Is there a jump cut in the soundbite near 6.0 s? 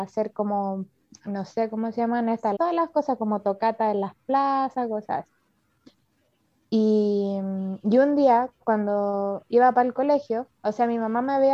no; 1 cut; at 2.6 s

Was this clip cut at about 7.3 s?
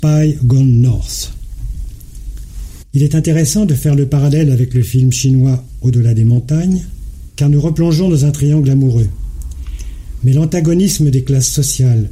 yes; 2 cuts; at 2.8 s, 7.3 s

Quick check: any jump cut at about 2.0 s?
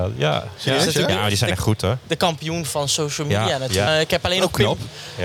no; 1 cut; at 3.9 s

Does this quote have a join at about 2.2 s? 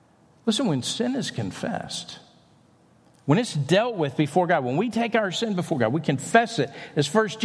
no; 0 cuts

